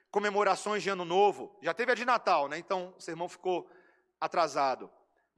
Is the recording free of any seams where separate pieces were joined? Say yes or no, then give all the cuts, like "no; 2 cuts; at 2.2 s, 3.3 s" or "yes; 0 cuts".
yes; 0 cuts